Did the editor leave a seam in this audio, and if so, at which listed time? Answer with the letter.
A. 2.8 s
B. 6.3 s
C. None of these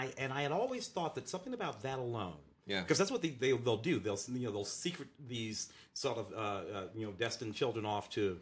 C